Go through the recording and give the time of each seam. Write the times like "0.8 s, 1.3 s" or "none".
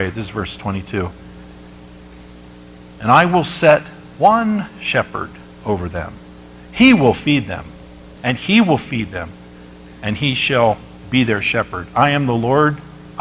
8.2 s